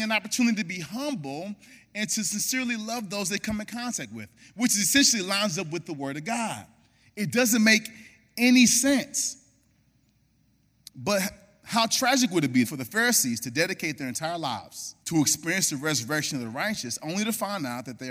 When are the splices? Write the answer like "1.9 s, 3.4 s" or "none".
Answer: 12.6 s, 15.0 s